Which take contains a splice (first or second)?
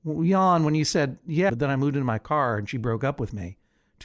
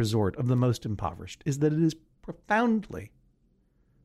first